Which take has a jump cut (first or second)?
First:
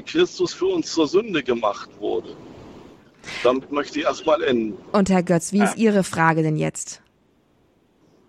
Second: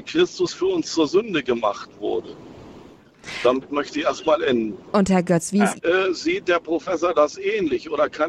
second